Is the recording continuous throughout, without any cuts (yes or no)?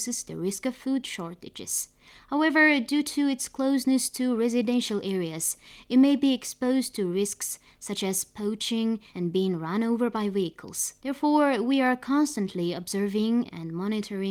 no